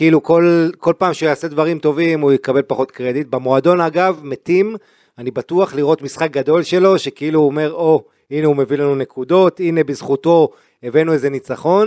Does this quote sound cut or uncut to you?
uncut